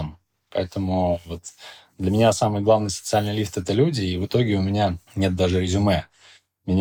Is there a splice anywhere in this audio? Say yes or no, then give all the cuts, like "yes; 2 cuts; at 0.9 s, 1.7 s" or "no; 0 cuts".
no; 0 cuts